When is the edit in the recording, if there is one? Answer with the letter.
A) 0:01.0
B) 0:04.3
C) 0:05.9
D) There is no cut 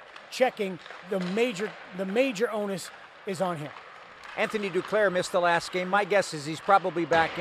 A